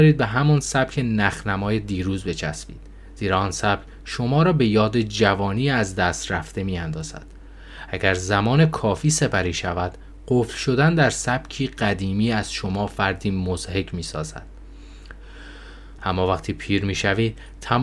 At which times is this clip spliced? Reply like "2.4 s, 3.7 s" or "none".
16.0 s